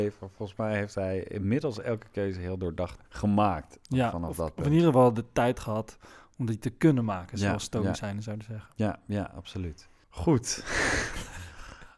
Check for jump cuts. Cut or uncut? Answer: uncut